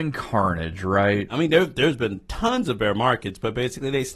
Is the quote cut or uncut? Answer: cut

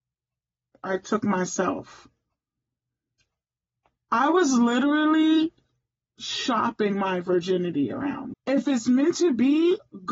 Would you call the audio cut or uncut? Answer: cut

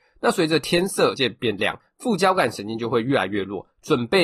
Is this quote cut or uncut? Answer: cut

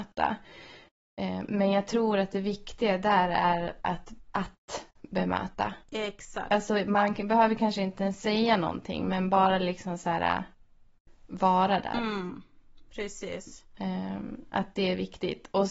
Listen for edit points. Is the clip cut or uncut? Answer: uncut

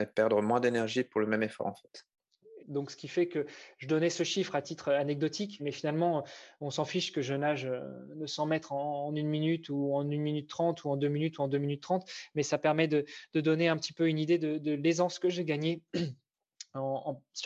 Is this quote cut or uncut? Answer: cut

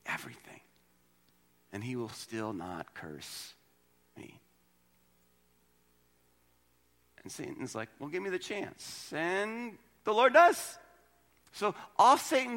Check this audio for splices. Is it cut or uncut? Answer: uncut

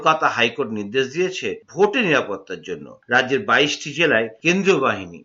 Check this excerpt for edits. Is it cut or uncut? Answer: uncut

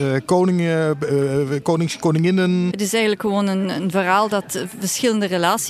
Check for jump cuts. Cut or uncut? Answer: cut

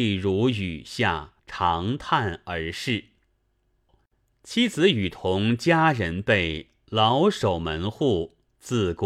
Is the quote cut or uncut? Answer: cut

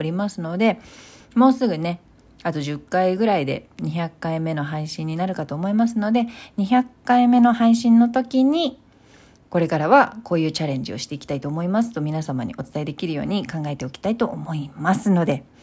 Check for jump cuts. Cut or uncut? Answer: cut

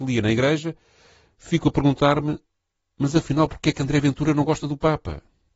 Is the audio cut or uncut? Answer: uncut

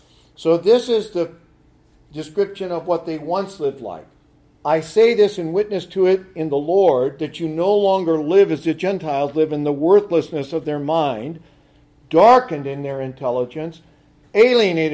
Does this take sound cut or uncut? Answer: uncut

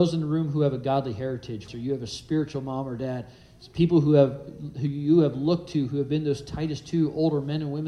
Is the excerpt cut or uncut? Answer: cut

